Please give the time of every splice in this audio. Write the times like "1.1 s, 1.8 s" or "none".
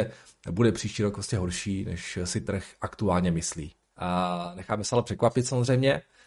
3.9 s

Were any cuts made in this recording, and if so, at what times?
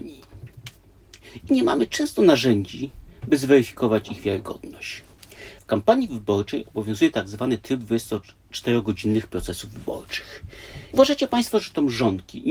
5.6 s, 10.9 s

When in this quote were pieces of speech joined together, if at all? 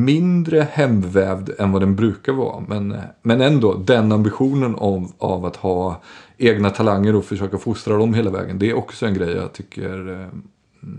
none

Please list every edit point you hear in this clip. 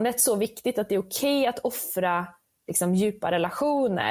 none

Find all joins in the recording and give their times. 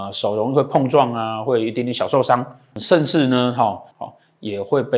2.7 s, 3.9 s

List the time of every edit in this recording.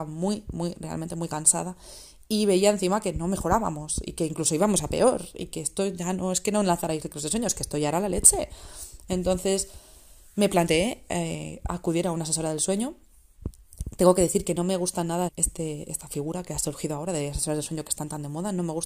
15.3 s

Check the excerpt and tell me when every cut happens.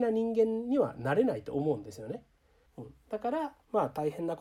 2.7 s

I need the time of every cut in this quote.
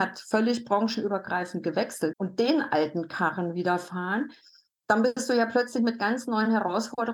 2.1 s

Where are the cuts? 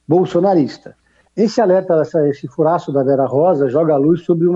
1.2 s

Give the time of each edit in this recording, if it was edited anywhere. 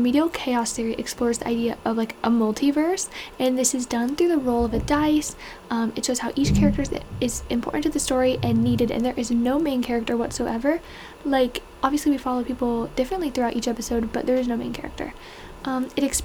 none

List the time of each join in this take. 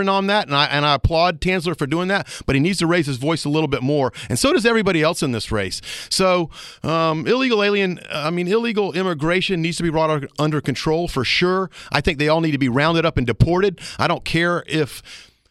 none

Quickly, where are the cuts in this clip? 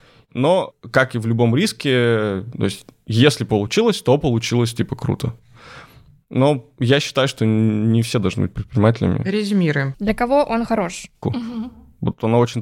9.9 s, 11.2 s

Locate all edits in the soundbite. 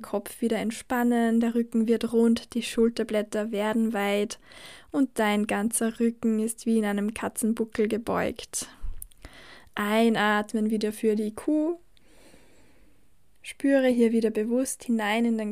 none

